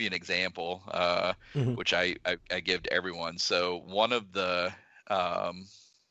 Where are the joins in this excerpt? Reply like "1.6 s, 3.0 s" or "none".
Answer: none